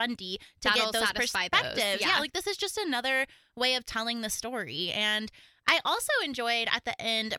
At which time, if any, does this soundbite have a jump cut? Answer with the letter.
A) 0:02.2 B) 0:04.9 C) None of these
C